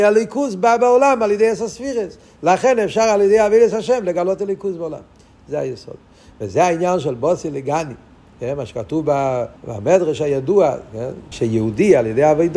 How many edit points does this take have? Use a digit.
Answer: 2